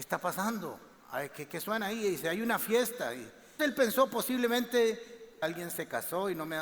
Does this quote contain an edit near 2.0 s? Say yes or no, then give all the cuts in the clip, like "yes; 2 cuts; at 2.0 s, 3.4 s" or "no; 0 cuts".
no; 2 cuts; at 3.6 s, 5.4 s